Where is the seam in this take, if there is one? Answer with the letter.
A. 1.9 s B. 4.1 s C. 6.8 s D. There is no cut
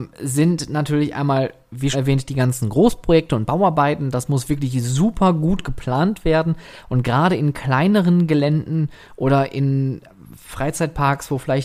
A